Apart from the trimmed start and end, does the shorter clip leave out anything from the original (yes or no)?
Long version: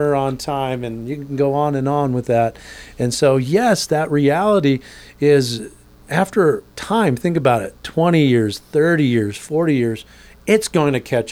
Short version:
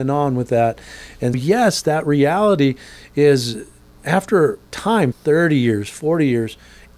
yes